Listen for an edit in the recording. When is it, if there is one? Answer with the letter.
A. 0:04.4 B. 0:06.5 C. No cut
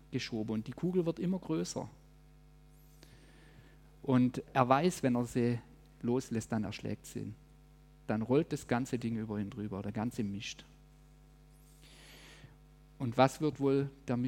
A